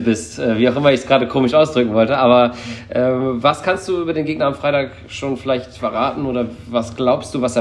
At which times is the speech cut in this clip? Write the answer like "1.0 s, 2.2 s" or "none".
none